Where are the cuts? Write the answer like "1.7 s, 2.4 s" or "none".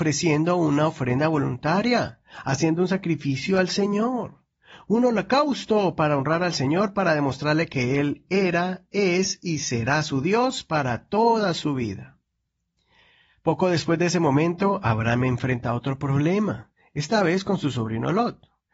none